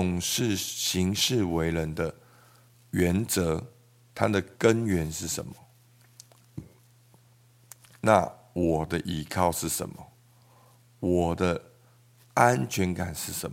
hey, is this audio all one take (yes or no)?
yes